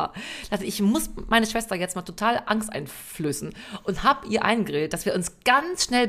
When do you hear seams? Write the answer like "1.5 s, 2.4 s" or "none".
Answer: none